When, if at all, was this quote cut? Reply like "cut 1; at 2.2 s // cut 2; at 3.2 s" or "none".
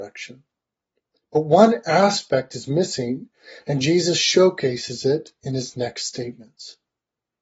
none